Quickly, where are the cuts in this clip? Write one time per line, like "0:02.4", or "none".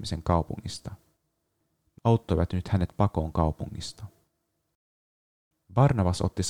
0:02.0